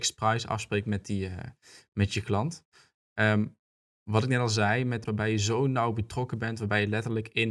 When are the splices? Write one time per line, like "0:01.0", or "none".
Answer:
0:05.1